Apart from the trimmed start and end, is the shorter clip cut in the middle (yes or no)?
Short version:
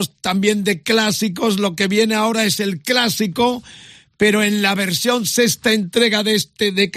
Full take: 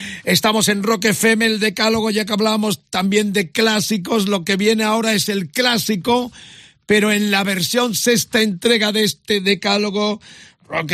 no